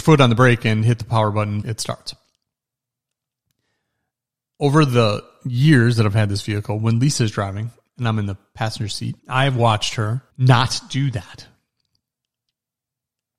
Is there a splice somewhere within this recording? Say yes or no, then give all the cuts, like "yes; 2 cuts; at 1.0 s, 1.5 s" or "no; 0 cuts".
yes; 3 cuts; at 1.6 s, 9.2 s, 10.3 s